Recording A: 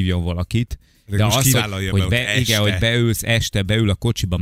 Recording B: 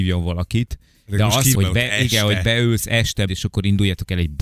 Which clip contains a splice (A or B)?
B